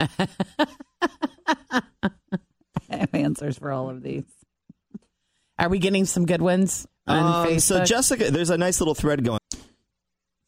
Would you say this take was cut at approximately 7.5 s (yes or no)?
no